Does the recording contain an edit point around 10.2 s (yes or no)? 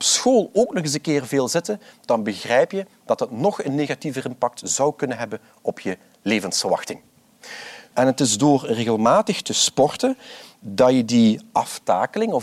no